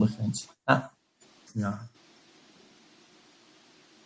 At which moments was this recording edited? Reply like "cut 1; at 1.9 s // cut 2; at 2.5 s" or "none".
cut 1; at 1.5 s